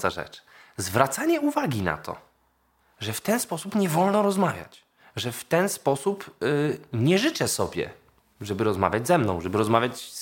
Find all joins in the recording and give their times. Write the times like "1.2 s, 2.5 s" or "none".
none